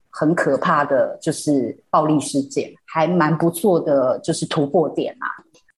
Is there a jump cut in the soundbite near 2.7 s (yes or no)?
yes